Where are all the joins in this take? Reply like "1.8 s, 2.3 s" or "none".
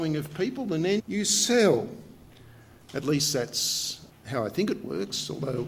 1.0 s, 4.1 s